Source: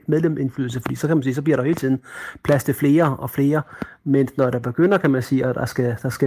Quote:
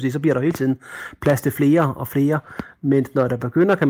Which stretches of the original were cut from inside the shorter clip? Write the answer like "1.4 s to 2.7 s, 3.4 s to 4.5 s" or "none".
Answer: none